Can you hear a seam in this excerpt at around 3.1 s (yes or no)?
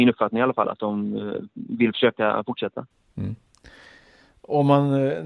no